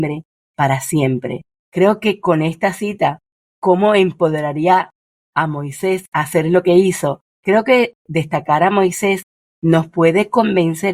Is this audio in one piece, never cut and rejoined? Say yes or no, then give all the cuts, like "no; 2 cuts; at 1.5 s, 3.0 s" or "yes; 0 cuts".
no; 2 cuts; at 1.6 s, 7.3 s